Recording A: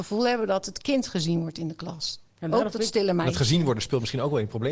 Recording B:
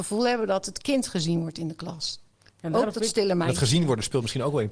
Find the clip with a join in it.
A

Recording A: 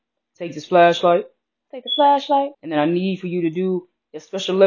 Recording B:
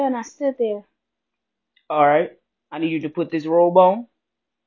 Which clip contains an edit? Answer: A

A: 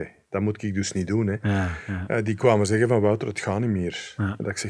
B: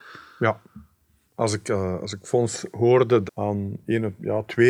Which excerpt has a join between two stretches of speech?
B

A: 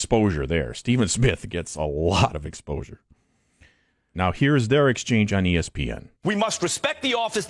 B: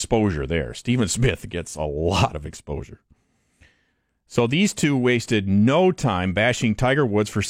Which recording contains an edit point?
A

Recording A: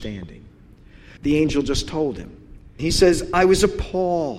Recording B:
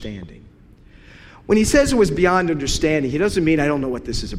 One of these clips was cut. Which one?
A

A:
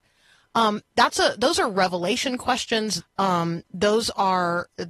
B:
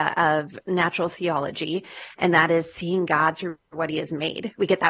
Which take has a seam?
A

